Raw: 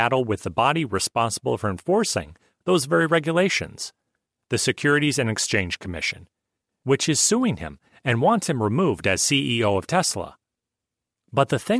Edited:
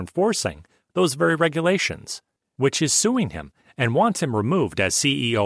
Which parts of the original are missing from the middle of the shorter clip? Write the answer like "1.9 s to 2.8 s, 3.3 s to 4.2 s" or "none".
4.1 s to 6.6 s